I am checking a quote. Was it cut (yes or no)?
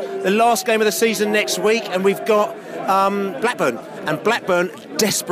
no